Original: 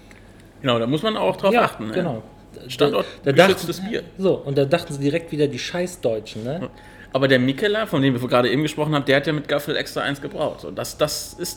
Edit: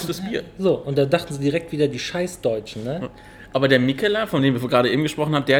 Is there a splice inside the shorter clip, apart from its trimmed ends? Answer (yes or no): no